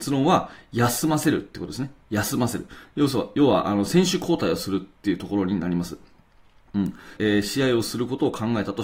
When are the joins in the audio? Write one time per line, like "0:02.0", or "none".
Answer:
0:07.2